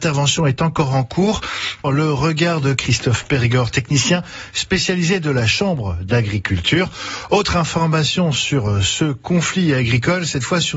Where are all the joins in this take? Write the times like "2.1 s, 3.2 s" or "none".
1.8 s